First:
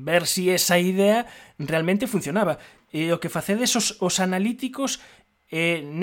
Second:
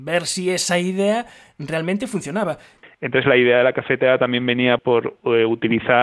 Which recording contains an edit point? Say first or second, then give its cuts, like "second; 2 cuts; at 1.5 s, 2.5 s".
second; 2 cuts; at 2.8 s, 4.8 s